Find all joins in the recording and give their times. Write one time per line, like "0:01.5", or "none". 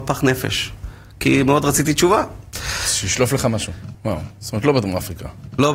0:03.9